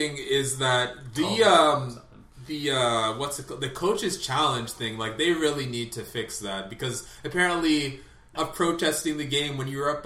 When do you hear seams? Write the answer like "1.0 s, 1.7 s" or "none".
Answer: 8.3 s